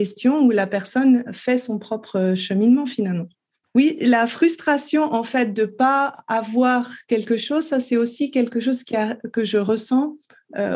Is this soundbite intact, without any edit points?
no; 1 cut; at 3.7 s

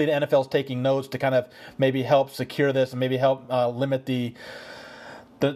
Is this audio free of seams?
yes; 0 cuts

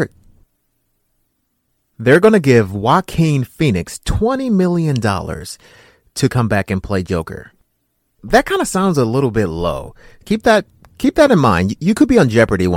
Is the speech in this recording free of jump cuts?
no; 2 cuts; at 8.2 s, 10.2 s

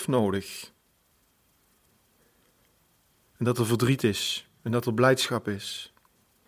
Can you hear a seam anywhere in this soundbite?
yes; 1 cut; at 3.2 s

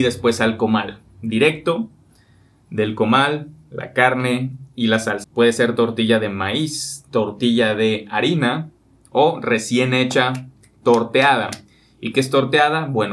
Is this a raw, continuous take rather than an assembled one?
no; 1 cut; at 5.2 s

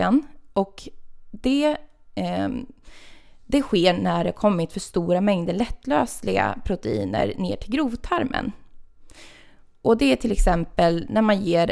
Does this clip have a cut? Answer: no; 0 cuts

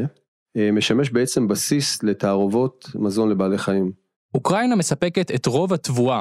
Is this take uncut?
no; 1 cut; at 4.2 s

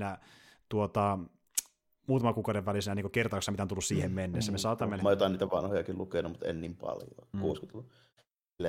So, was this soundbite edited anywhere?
yes; 2 cuts; at 5.0 s, 7.3 s

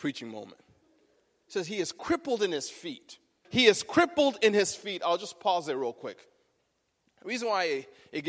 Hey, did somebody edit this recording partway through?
yes; 1 cut; at 3.4 s

